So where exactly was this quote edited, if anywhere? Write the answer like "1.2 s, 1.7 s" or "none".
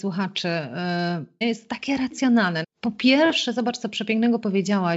1.4 s, 2.6 s